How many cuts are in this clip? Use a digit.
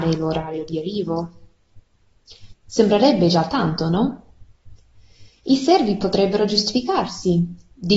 1